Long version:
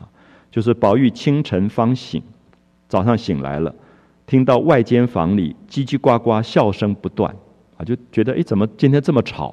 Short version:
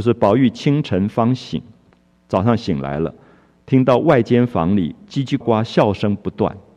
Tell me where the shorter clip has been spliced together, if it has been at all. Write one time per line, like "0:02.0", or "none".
0:05.4

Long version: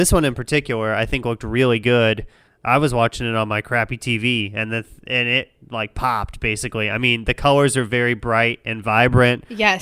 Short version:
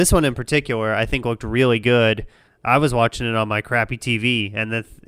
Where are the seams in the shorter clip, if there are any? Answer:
none

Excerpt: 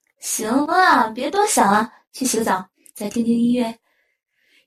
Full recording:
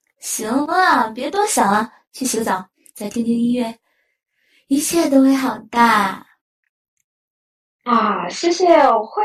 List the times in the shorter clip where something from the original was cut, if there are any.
none

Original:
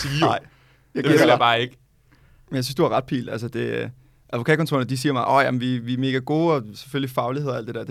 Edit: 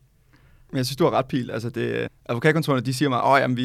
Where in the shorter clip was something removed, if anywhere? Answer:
0:02.1

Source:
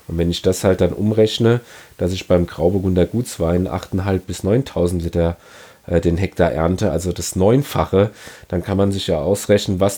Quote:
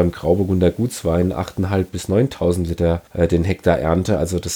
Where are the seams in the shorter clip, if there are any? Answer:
0:03.1

